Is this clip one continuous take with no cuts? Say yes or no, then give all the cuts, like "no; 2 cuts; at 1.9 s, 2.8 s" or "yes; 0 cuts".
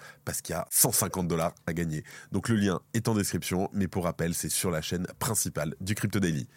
yes; 0 cuts